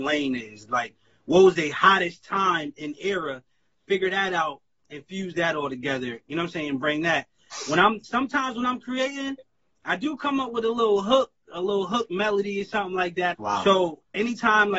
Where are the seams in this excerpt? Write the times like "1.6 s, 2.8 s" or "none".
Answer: 13.3 s